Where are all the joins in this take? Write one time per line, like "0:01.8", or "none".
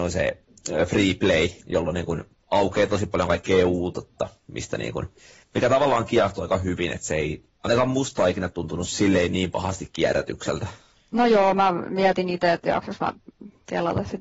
0:01.6